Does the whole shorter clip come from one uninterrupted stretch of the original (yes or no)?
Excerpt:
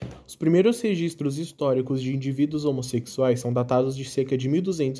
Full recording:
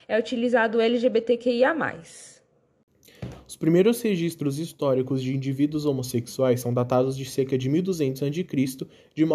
yes